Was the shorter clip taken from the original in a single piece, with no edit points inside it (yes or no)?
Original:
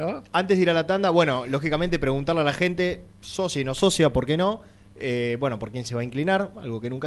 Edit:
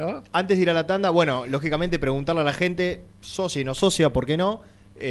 yes